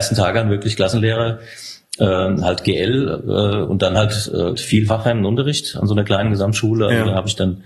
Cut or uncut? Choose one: cut